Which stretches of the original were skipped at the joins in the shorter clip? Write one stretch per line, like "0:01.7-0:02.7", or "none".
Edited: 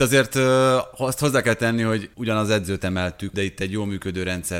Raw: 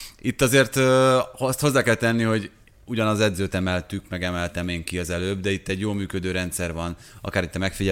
0:02.5-0:02.8
0:04.0-0:05.4